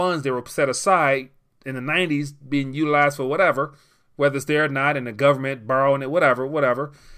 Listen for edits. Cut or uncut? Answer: uncut